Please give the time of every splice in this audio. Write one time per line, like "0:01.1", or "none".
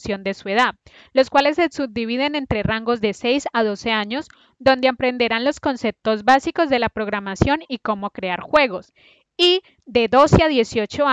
none